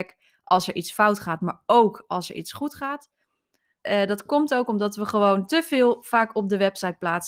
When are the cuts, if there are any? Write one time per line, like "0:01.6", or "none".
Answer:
0:03.8